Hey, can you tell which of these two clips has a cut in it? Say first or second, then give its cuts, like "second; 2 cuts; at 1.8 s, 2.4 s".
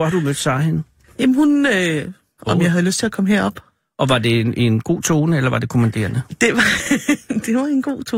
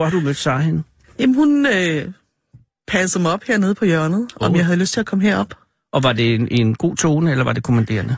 first; 1 cut; at 2.4 s